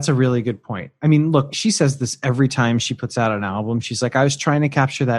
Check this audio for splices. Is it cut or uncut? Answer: cut